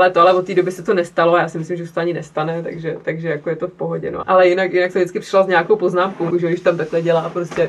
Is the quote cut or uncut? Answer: cut